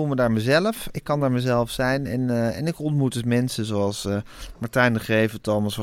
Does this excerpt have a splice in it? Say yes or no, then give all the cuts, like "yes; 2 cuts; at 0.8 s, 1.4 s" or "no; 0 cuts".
no; 0 cuts